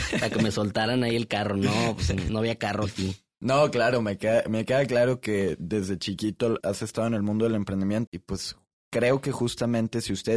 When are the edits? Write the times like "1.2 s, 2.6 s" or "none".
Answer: 6.6 s, 8.1 s